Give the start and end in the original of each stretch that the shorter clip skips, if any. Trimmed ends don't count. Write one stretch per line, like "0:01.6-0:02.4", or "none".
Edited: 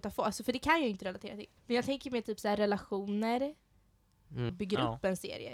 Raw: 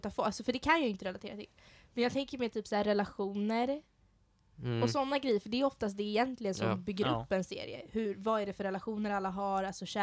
0:01.6-0:01.9
0:04.8-0:06.8